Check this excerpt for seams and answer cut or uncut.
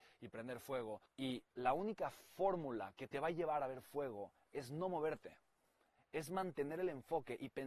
cut